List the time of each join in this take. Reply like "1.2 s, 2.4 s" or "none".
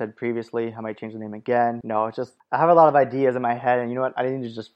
1.8 s